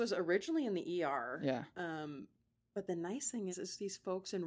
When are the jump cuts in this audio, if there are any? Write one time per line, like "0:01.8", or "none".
0:03.5